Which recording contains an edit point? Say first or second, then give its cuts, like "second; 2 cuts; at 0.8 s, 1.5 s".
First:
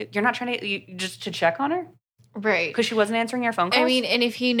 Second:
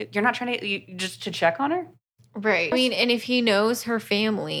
second; 1 cut; at 2.7 s